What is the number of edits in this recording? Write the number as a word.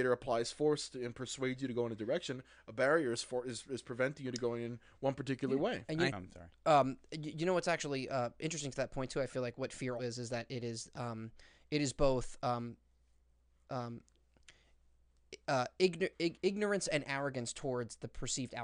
two